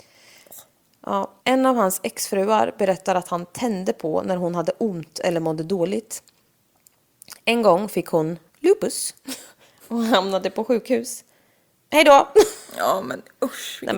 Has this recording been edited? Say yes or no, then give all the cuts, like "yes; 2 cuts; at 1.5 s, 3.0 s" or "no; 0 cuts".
yes; 3 cuts; at 1.4 s, 8.5 s, 11.7 s